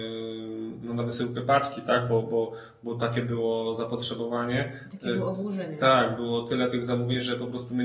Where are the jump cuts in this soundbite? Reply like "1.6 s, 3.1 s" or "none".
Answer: none